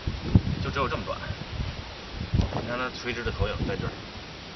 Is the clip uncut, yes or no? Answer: yes